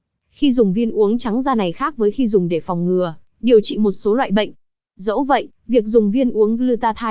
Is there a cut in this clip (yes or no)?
yes